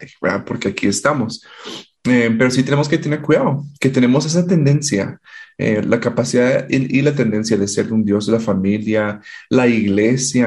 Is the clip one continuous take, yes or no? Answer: yes